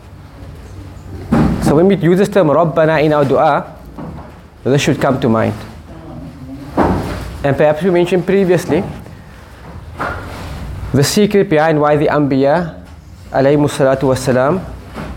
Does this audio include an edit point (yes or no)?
no